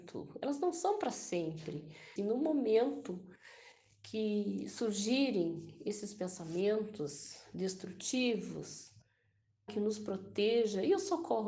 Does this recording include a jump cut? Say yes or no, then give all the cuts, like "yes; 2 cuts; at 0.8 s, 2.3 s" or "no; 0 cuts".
yes; 2 cuts; at 2.2 s, 9.7 s